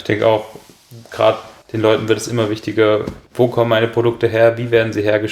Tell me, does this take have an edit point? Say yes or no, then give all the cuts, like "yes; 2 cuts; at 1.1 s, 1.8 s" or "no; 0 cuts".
yes; 2 cuts; at 1.6 s, 3.3 s